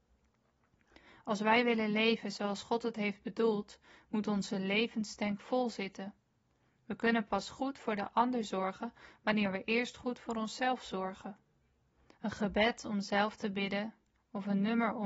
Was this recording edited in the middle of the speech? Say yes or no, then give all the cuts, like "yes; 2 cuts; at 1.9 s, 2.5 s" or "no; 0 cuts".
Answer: yes; 1 cut; at 12.1 s